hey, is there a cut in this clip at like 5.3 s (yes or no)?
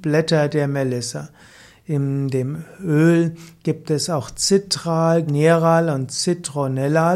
yes